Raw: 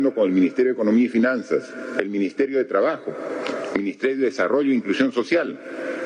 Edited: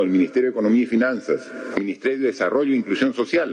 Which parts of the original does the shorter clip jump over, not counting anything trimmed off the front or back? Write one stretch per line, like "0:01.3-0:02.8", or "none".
0:01.9-0:03.7